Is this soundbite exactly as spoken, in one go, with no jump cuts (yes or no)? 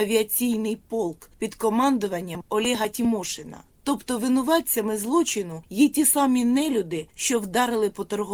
yes